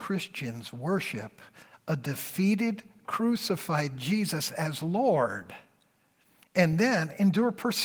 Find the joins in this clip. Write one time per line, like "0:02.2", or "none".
none